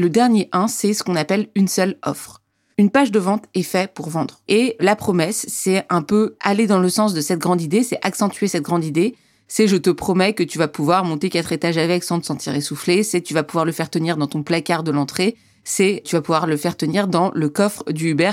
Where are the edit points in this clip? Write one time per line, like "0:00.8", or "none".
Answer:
0:04.5